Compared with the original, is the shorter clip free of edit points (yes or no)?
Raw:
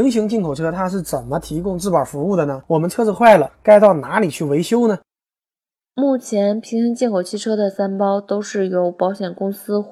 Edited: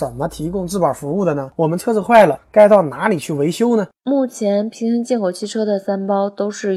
no